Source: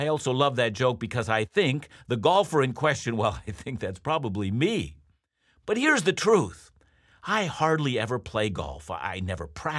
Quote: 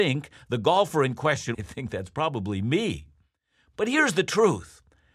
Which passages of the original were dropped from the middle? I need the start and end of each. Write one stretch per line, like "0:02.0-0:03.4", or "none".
0:03.1-0:03.4